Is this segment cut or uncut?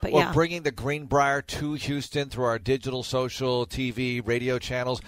uncut